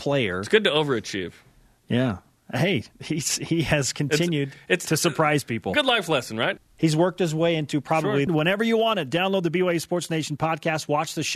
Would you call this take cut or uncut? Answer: cut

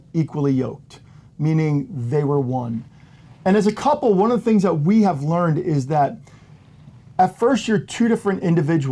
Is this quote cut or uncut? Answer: uncut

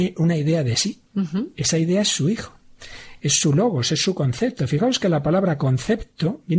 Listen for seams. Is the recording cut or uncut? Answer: cut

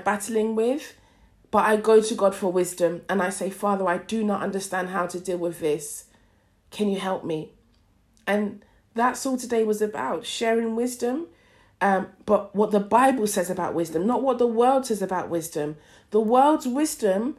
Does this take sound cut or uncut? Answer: uncut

